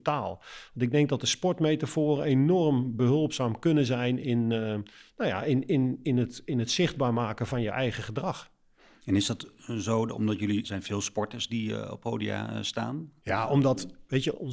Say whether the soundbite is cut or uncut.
cut